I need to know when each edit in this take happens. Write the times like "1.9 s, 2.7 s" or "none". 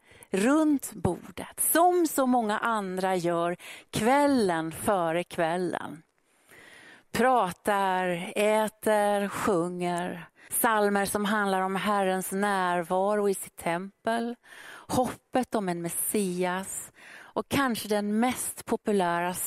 10.5 s